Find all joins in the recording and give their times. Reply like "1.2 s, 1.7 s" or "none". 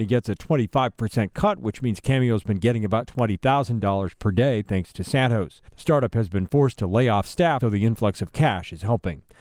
5.7 s, 7.6 s